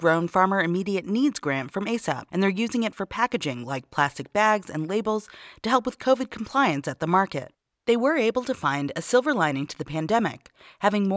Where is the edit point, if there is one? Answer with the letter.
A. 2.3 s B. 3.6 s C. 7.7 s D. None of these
A